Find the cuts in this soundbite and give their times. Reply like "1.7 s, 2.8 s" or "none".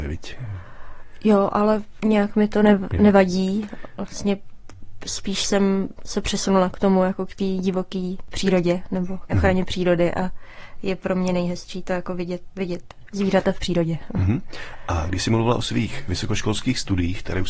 9.3 s, 12.5 s